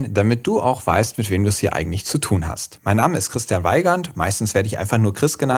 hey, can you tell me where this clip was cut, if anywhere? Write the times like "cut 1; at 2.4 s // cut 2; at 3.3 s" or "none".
none